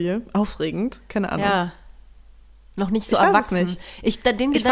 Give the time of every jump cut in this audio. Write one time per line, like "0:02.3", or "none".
none